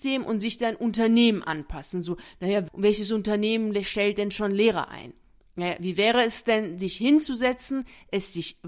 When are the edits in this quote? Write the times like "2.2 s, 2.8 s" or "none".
none